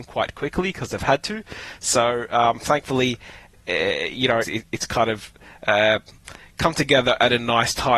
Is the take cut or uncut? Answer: cut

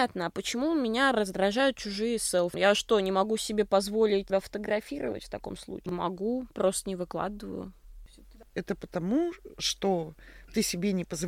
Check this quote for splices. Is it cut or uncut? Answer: uncut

